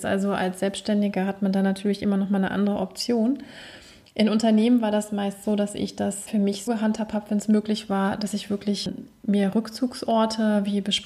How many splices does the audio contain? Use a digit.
1